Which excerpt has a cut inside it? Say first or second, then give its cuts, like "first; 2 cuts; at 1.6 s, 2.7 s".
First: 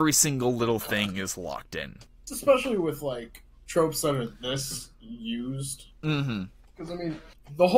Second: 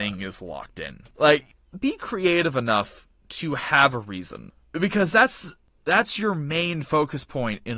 second; 1 cut; at 1.1 s